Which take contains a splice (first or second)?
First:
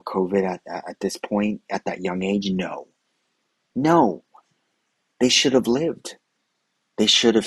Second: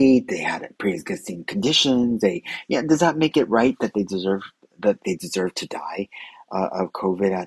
second